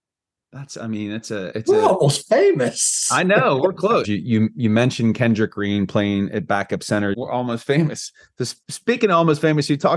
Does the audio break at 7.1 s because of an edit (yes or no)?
yes